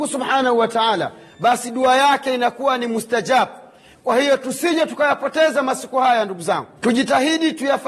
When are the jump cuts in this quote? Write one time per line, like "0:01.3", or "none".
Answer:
0:06.8